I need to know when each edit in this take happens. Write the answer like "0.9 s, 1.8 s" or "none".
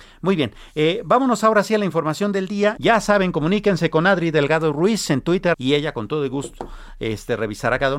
2.8 s, 5.5 s